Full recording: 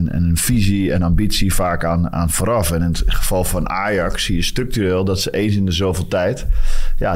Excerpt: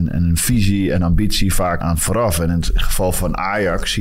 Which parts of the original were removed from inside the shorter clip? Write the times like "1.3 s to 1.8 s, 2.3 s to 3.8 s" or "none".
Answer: 1.8 s to 2.1 s